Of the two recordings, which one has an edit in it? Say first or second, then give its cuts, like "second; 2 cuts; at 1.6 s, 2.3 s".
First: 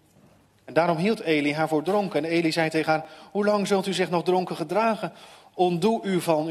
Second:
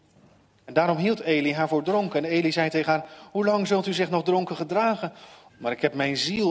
second; 1 cut; at 5.5 s